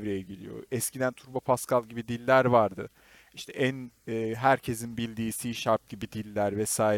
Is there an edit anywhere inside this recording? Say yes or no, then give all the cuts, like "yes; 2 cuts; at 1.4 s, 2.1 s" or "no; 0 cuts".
yes; 1 cut; at 5.3 s